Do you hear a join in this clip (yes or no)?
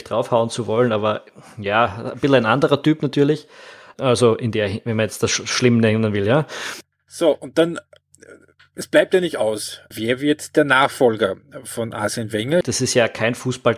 yes